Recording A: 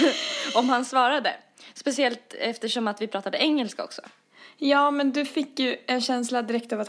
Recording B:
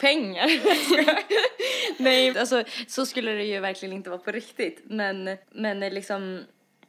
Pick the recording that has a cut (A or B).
B